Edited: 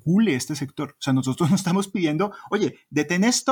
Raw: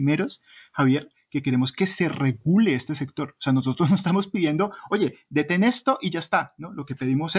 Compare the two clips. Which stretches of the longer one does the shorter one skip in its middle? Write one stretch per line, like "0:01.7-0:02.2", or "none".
none